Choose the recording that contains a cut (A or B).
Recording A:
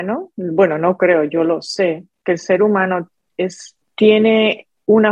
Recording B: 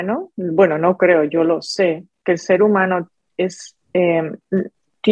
A